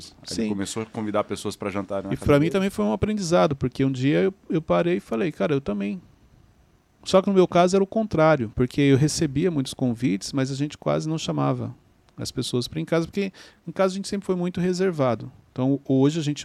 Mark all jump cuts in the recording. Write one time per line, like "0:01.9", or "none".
0:08.5

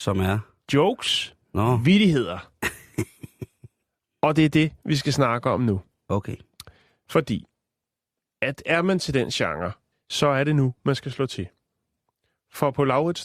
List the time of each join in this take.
0:09.9

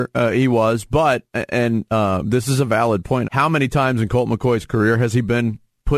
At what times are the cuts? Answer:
0:03.2

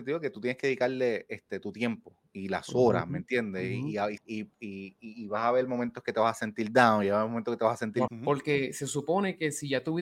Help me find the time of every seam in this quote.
0:04.2
0:08.1

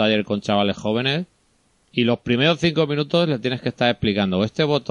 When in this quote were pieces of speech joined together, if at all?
none

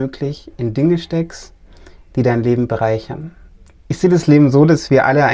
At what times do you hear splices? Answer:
0:03.8

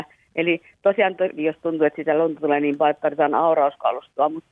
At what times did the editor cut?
0:01.4

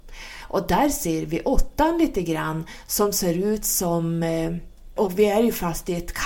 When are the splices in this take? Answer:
0:05.0

